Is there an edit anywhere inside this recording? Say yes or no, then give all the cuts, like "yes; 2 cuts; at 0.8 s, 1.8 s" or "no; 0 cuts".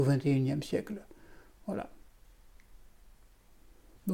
no; 0 cuts